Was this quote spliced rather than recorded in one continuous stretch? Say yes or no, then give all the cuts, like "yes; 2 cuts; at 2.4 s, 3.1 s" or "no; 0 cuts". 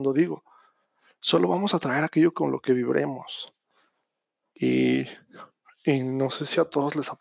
yes; 1 cut; at 4.5 s